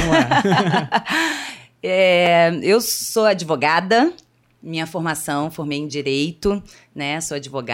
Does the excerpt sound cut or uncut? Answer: uncut